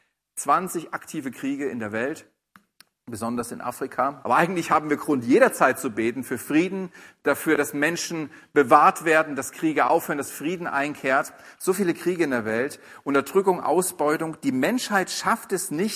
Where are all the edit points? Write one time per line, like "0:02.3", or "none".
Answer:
0:04.2